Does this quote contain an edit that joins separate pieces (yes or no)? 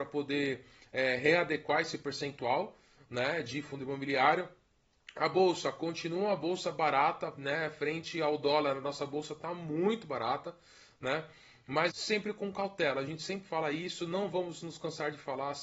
yes